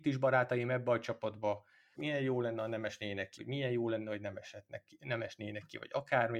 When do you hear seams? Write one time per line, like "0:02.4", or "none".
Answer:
0:01.9
0:03.4